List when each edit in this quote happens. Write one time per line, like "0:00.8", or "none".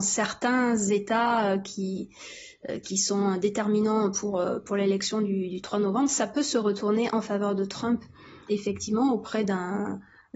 0:08.5

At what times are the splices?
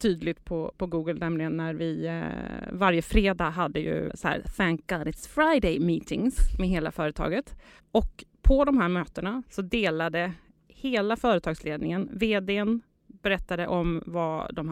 0:04.1
0:07.8

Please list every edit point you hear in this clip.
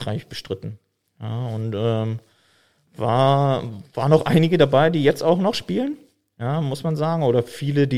none

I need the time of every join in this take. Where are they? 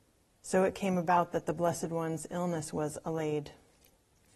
none

